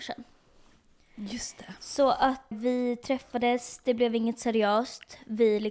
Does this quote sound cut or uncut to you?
cut